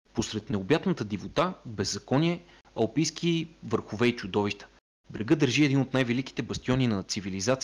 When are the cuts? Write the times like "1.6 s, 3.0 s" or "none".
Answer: none